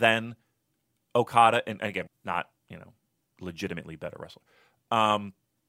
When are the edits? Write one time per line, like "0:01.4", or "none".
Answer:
0:02.1